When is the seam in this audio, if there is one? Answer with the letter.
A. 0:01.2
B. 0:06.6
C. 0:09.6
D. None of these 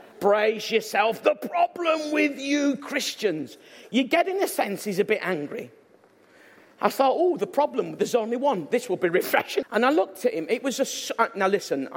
C